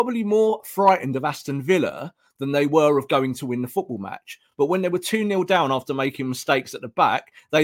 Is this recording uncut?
yes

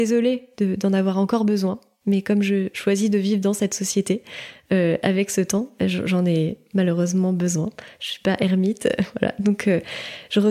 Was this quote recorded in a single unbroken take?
yes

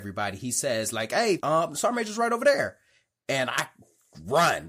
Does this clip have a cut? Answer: yes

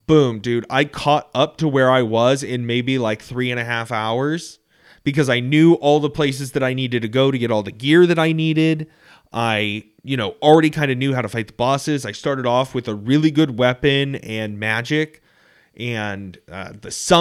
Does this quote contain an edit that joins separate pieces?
no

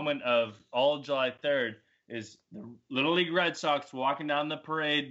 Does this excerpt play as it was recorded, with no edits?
yes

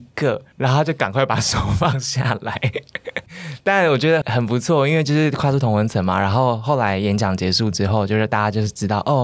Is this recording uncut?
no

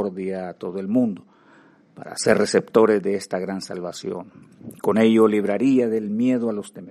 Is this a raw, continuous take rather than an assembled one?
yes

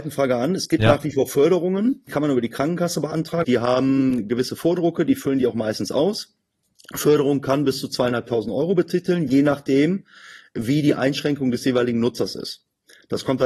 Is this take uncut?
no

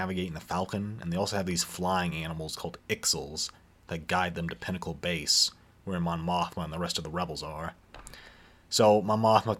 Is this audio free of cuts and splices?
yes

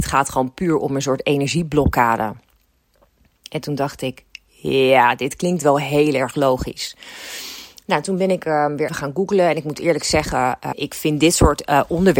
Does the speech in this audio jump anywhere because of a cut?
yes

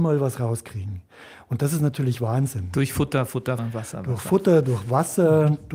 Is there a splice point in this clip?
yes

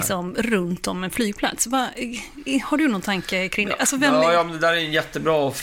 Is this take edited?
no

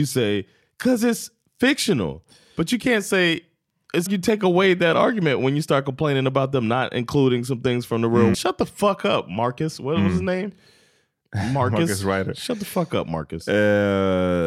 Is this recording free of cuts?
no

